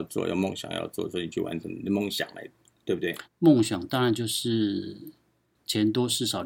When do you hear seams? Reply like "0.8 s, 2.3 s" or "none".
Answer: 3.2 s